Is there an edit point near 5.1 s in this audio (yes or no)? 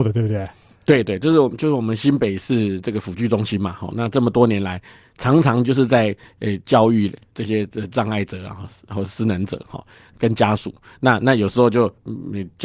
no